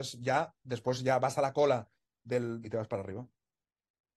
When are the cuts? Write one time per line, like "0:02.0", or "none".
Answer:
0:02.6